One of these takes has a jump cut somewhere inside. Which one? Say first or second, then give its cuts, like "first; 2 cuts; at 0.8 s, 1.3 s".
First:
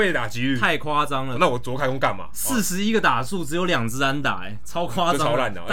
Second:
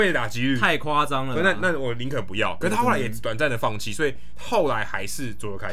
first; 1 cut; at 1.3 s